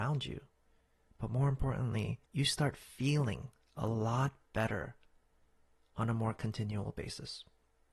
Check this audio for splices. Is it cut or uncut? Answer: cut